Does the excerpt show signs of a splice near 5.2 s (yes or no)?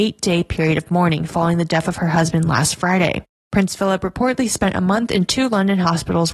no